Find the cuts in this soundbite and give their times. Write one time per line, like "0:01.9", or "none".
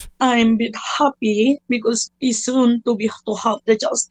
0:02.1